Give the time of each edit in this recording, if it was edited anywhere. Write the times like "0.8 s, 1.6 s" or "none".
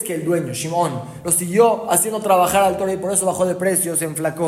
none